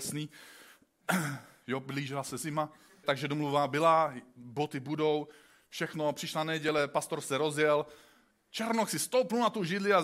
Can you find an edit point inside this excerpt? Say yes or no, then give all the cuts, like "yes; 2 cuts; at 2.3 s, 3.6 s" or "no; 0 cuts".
yes; 1 cut; at 3.0 s